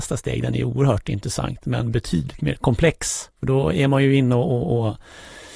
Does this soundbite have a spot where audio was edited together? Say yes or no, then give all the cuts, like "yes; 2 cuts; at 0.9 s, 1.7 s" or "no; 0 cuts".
yes; 1 cut; at 3.3 s